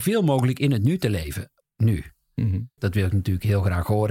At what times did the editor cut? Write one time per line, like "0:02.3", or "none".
0:01.6
0:02.8